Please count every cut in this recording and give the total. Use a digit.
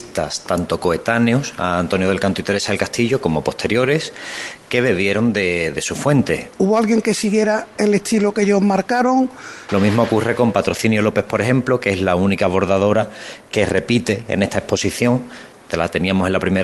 2